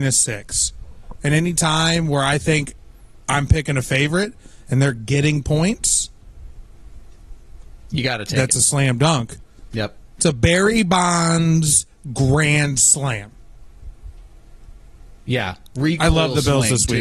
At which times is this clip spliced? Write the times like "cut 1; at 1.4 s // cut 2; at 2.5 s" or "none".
none

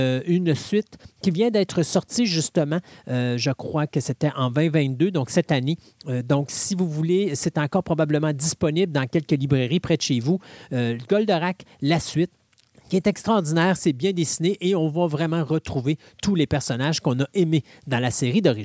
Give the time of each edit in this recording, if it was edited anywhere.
none

